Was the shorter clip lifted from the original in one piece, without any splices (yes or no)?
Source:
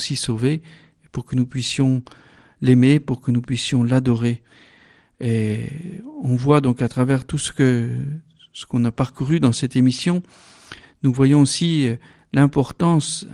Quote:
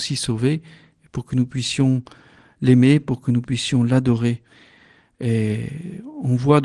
yes